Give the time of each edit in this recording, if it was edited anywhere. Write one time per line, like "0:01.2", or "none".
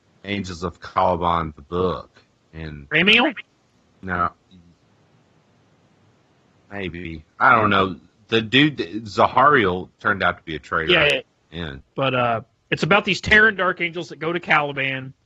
0:11.8

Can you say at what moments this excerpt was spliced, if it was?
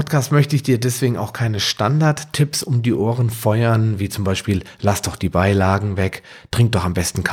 none

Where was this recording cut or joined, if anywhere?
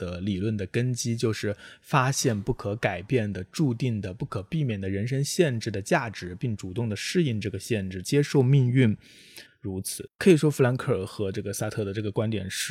0:08.0
0:09.5

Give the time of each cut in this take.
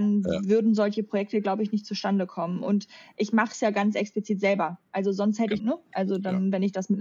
0:05.6

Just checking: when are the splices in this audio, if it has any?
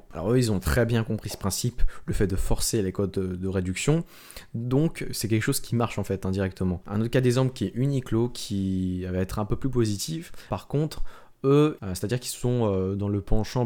0:06.8
0:10.5
0:11.8

